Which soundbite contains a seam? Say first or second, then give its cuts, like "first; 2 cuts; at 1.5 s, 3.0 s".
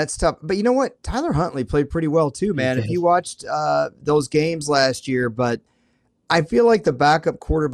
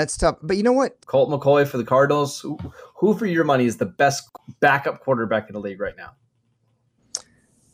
second; 1 cut; at 1.0 s